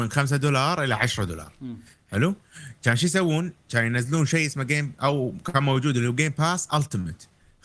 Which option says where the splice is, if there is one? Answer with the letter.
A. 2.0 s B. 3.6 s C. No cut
C